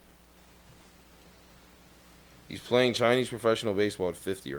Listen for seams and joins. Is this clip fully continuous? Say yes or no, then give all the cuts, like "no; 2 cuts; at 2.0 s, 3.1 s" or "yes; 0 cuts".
yes; 0 cuts